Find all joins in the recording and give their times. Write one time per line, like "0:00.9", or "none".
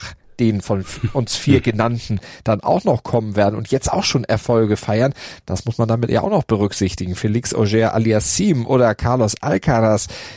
none